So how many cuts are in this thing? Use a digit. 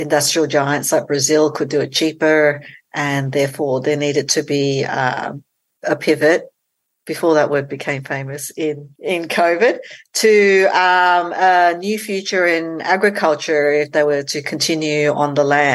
0